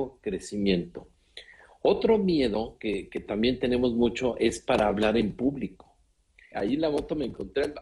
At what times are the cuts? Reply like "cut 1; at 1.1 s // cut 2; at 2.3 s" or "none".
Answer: cut 1; at 6.5 s